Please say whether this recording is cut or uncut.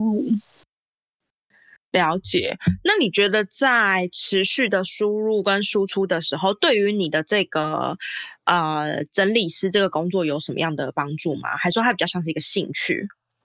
uncut